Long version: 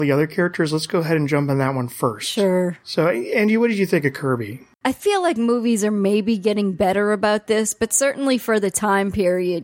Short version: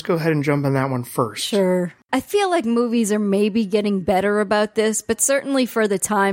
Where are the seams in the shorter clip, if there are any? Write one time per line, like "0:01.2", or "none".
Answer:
0:02.0

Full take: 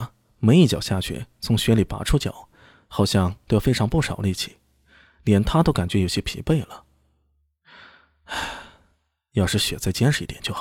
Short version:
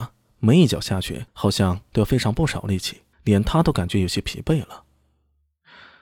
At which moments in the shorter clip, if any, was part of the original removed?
0:01.3
0:03.1

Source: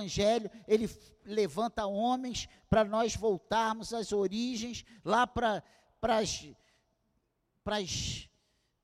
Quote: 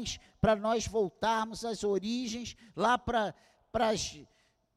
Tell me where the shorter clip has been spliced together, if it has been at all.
none

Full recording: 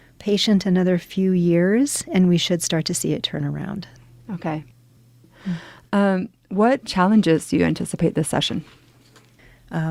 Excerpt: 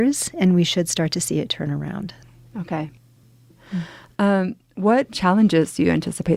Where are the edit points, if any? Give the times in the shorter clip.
none

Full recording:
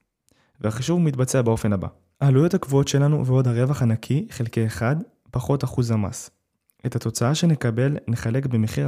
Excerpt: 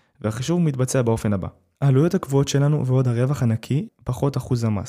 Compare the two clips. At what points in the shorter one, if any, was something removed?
0:03.9

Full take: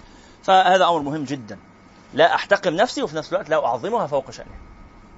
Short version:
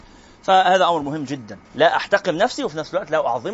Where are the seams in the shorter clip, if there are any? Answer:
0:01.6

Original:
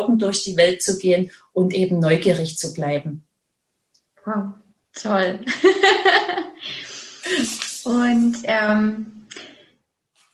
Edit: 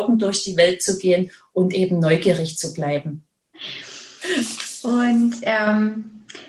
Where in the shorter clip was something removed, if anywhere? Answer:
0:03.5

